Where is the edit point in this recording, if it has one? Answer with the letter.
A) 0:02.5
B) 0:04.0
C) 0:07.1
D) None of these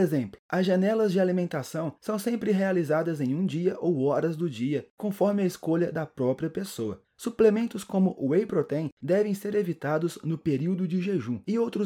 C